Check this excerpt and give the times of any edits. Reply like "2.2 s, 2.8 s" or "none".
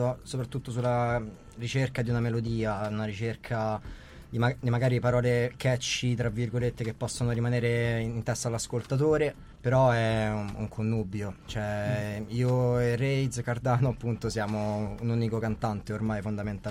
9.5 s